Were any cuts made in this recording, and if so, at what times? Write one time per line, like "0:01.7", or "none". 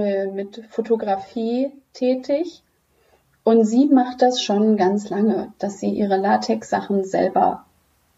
none